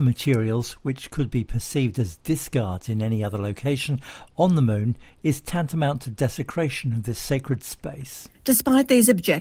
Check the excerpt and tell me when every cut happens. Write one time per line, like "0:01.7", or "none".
0:08.3